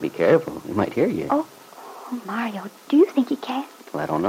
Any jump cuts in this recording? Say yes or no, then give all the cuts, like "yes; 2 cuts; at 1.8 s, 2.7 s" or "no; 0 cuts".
no; 0 cuts